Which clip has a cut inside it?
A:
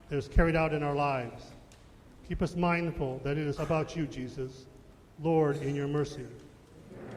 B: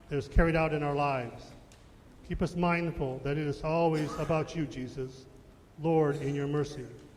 A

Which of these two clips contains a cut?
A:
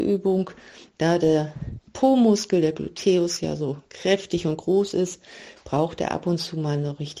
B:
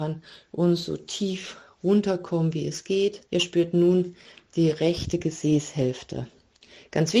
B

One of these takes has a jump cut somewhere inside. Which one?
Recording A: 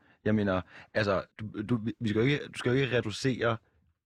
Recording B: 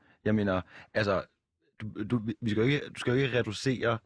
A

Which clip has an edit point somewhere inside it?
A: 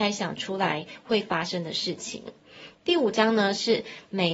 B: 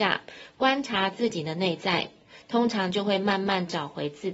A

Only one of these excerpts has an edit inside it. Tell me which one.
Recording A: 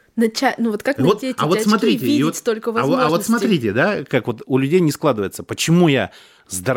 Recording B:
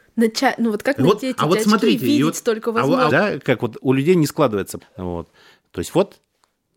B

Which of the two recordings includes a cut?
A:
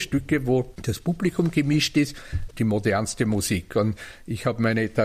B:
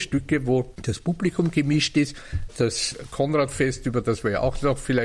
A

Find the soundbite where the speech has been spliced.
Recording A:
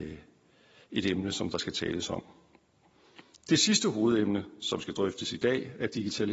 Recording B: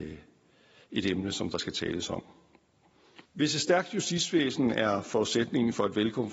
B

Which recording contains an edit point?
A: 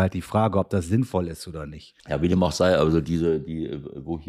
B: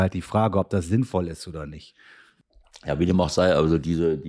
A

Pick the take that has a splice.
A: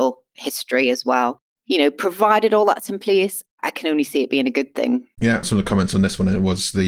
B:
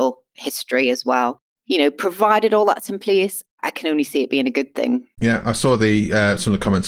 A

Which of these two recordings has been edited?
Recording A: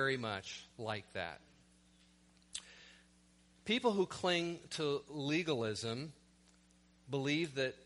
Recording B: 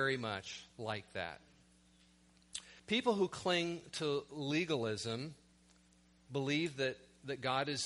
B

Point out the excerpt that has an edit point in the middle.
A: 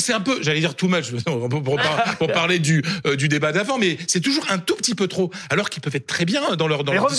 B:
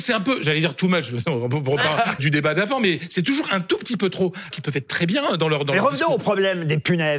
B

